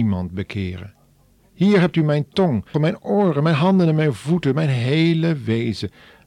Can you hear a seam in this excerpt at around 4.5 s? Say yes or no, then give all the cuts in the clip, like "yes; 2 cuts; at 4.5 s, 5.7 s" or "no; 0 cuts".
no; 2 cuts; at 1.4 s, 2.7 s